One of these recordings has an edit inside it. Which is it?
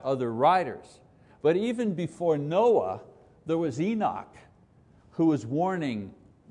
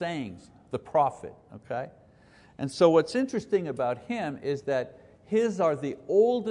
first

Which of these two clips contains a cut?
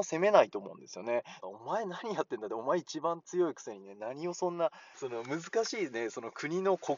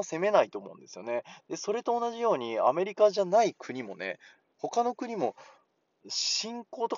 first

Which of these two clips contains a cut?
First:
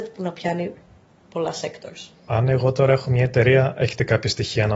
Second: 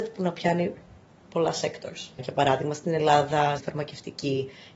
second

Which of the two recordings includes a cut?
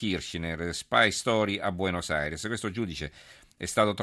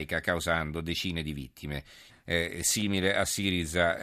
second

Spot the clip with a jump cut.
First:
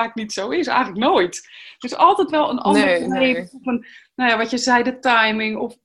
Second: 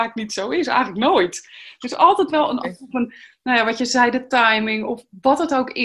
second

